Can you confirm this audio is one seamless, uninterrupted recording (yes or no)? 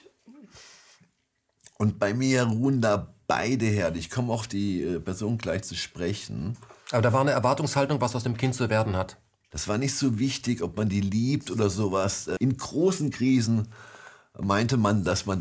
no